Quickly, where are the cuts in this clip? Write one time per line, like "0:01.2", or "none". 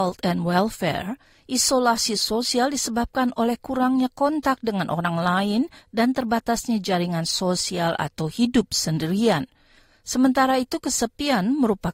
none